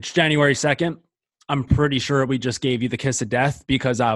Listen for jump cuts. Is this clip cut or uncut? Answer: uncut